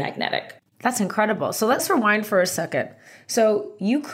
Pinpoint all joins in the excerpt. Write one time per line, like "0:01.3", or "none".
none